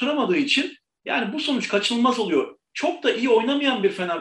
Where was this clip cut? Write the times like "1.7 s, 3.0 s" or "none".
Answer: none

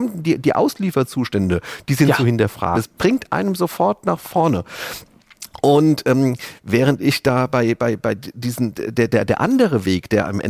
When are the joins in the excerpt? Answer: 2.7 s

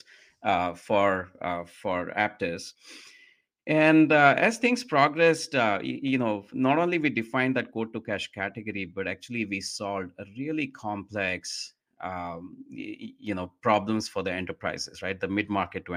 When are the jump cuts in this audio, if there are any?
none

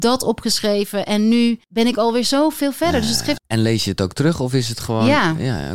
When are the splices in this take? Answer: 1.6 s, 3.4 s

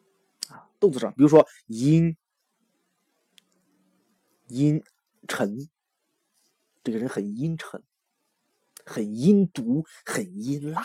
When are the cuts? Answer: none

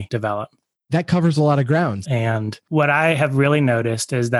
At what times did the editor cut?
2.0 s

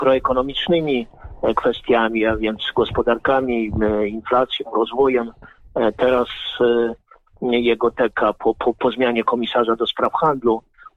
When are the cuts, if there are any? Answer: none

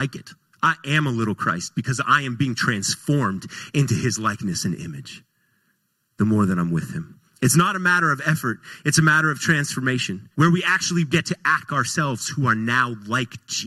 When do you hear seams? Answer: 10.3 s, 11.7 s

